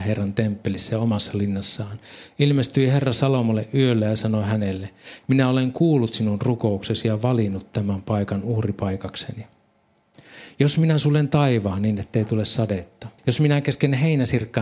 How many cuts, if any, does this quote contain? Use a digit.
1